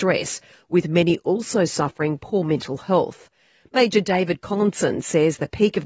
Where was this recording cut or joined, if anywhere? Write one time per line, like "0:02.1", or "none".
none